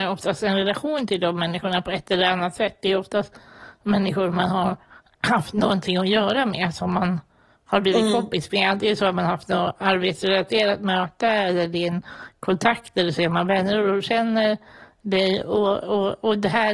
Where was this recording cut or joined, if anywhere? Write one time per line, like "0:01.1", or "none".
none